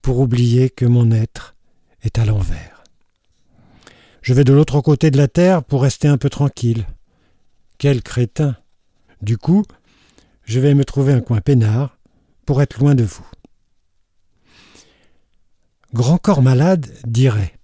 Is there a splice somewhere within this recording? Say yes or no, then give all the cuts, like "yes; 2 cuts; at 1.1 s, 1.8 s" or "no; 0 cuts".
yes; 2 cuts; at 4.1 s, 9.1 s